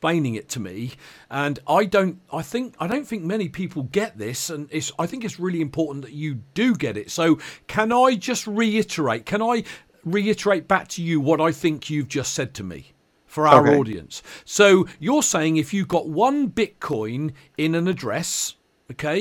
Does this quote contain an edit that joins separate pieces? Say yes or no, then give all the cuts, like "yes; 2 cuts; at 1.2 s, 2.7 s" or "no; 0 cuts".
no; 0 cuts